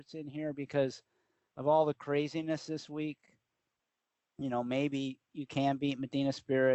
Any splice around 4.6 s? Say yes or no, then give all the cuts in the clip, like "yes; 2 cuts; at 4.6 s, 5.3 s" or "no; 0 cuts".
no; 0 cuts